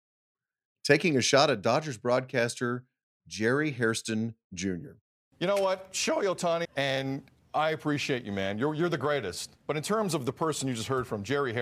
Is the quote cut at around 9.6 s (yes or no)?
no